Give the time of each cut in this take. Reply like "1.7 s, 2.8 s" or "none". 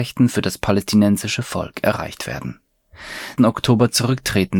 3.4 s